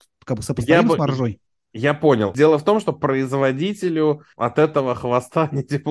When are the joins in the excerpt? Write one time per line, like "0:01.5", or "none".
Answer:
none